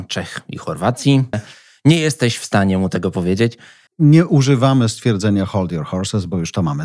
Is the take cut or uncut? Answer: cut